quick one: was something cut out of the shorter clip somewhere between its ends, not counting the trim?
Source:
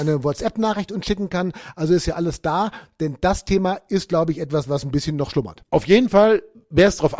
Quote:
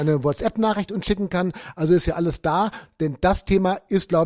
no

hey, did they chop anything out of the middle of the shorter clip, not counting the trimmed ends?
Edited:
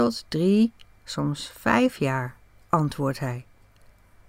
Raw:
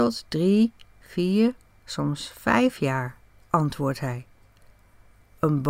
yes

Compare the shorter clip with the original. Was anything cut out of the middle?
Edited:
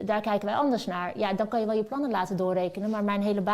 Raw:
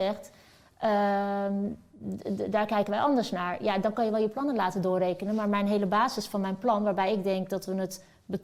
no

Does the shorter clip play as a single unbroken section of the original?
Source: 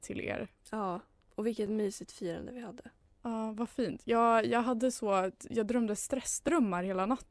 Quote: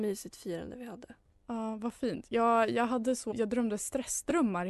no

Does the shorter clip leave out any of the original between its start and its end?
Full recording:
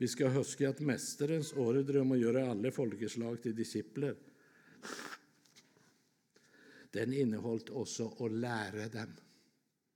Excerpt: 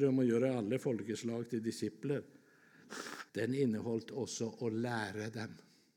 yes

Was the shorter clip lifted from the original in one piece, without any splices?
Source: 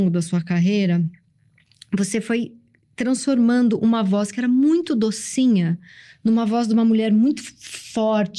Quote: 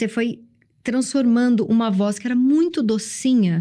yes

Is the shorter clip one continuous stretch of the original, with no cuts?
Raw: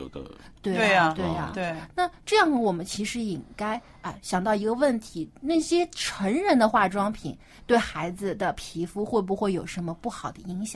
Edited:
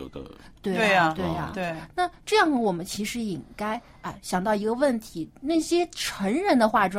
yes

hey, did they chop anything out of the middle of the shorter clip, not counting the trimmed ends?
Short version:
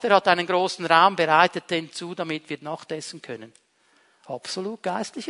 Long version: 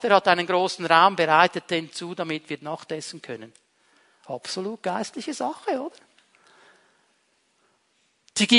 no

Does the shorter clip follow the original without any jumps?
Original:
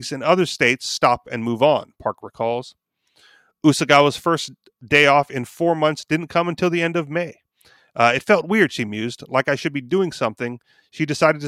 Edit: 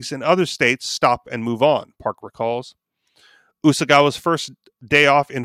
yes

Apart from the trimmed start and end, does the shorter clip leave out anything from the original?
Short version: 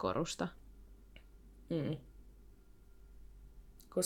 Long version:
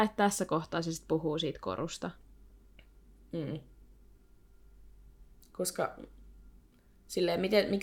no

